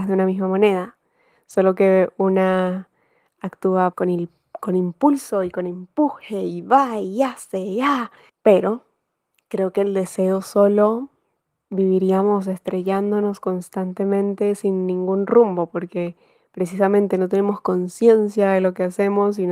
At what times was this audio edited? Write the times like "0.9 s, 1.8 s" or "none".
3.9 s